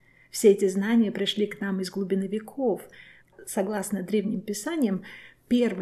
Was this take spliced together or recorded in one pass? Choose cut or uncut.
cut